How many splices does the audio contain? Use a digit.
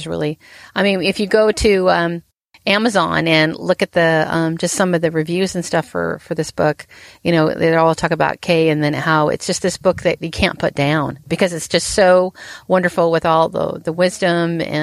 0